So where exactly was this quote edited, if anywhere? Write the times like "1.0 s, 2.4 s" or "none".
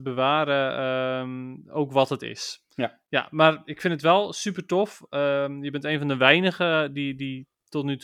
none